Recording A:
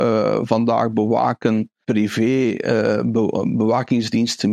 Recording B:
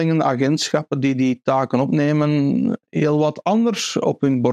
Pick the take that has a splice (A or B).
A